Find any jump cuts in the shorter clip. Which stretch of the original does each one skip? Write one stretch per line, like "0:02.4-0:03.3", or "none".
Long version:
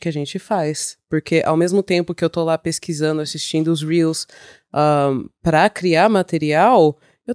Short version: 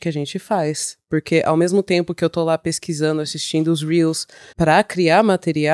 0:04.5-0:05.4